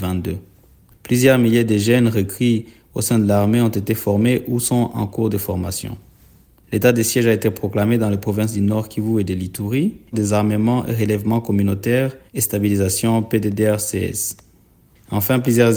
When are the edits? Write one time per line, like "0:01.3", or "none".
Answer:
0:10.1
0:12.3